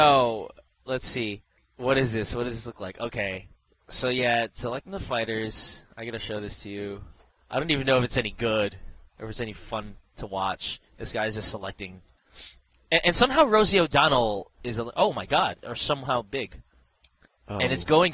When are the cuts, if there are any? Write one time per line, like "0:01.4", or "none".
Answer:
0:15.6

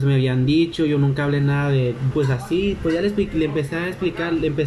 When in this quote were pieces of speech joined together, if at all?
0:02.1

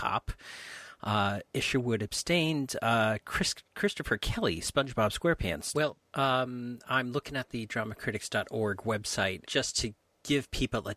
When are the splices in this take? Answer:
0:05.7
0:09.4

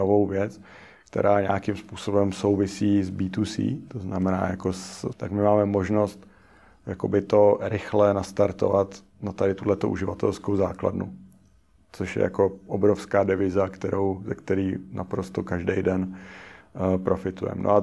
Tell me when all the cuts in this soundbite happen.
0:05.1

